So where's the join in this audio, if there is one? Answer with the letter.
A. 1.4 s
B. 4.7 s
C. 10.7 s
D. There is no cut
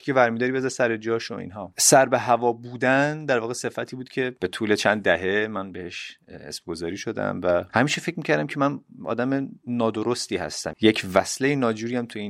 C